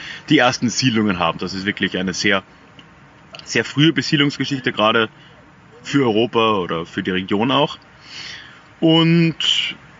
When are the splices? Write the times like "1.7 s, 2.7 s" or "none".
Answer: 1.4 s